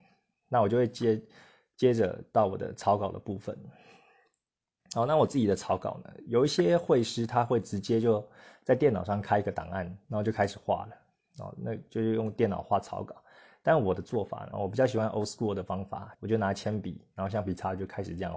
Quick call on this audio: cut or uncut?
cut